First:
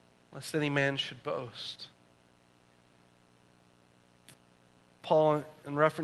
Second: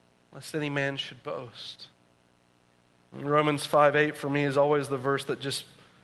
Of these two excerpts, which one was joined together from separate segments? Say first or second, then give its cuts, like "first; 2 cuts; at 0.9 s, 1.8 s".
second; 1 cut; at 3.1 s